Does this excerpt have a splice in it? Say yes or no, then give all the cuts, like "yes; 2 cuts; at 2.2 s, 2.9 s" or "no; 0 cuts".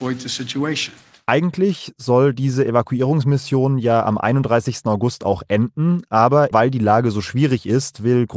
yes; 1 cut; at 6.5 s